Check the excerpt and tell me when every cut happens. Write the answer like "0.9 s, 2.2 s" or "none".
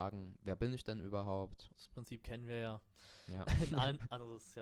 1.7 s